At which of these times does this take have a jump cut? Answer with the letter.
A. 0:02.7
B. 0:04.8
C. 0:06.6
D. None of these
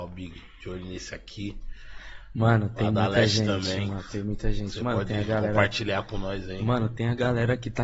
D